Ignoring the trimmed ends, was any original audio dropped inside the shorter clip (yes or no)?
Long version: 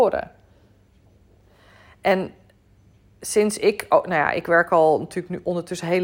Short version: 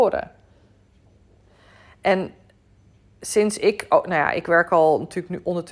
no